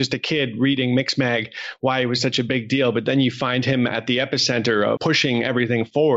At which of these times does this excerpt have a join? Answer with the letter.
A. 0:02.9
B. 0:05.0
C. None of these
B